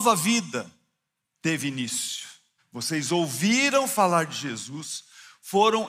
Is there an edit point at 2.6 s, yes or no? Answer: yes